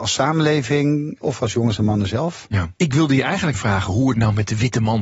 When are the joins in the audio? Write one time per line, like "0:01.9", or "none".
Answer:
0:03.5